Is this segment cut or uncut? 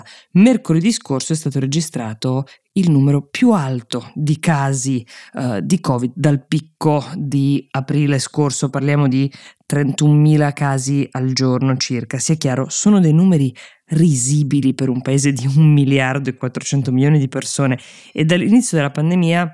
uncut